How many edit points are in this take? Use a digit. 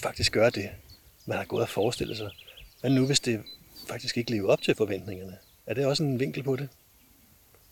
0